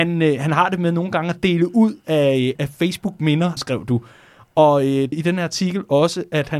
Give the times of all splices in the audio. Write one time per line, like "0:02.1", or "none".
0:02.5
0:03.6
0:05.1